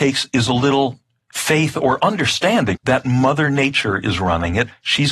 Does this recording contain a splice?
yes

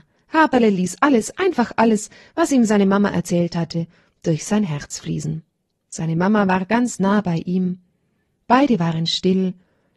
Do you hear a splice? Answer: yes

